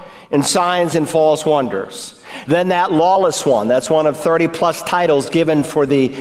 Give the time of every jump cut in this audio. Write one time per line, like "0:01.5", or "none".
0:02.5